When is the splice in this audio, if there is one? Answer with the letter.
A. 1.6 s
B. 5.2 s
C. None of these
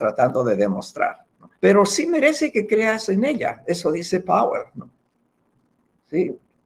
A